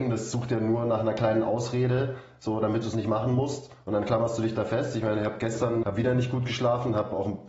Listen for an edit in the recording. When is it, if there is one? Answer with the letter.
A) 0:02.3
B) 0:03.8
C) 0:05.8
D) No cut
C